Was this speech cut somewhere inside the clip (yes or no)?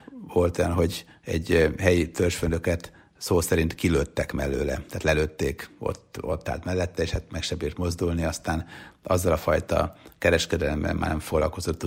no